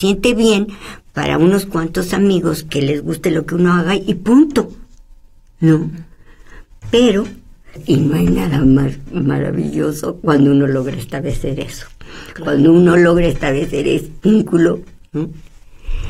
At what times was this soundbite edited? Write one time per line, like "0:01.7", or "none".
none

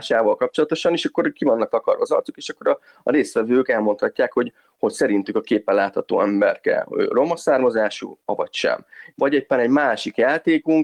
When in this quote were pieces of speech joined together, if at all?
0:09.1

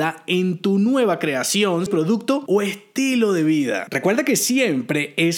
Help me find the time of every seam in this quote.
0:01.9

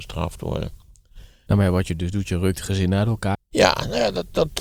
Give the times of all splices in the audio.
0:01.5
0:03.3

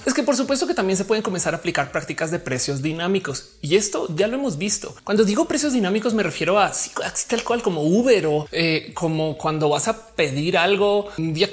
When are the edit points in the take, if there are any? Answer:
none

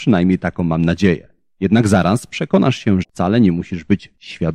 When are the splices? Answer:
0:03.0

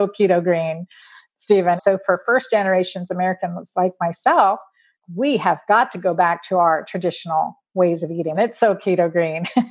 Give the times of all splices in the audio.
0:01.8
0:08.3

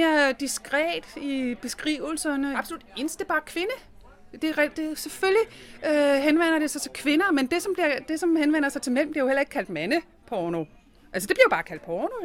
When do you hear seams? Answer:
0:02.5
0:04.7

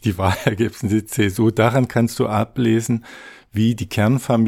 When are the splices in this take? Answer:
none

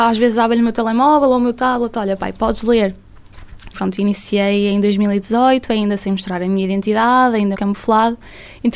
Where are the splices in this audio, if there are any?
0:03.7
0:07.5

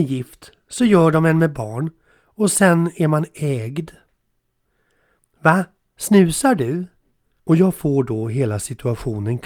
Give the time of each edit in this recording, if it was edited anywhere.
0:05.2
0:07.4

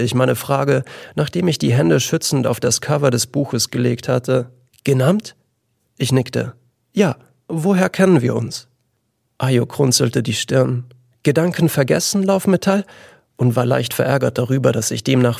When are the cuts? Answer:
0:04.7

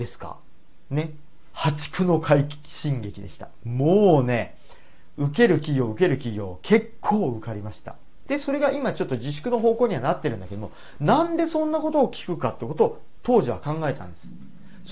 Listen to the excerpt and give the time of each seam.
0:01.5
0:08.2

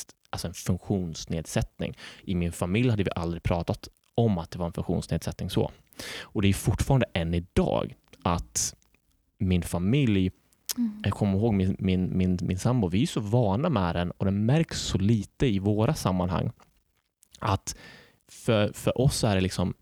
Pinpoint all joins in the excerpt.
none

